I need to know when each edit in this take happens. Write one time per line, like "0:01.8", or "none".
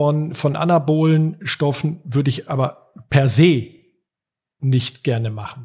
none